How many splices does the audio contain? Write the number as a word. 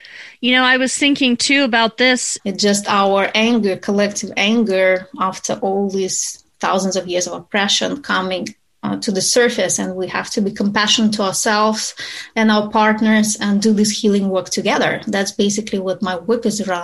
one